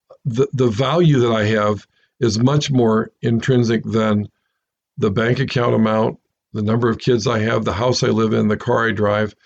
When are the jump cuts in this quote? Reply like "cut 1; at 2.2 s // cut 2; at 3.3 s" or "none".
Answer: none